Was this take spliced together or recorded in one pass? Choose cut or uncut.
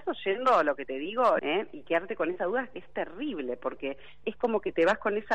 cut